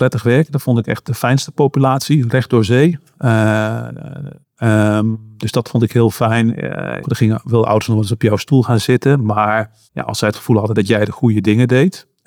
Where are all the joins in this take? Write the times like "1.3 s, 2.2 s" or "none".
4.4 s, 7.0 s, 9.9 s